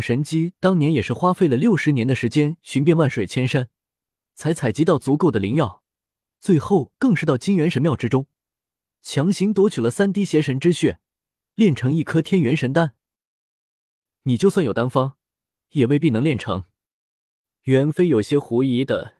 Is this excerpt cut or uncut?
uncut